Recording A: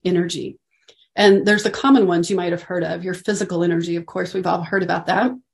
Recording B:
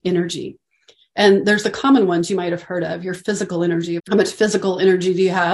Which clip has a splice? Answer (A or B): B